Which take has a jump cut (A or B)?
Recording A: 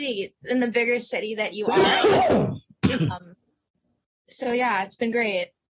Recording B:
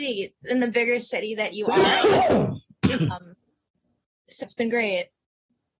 B